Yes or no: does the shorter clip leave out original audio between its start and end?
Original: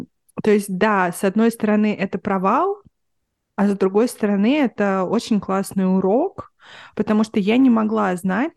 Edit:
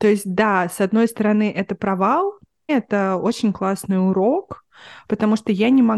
yes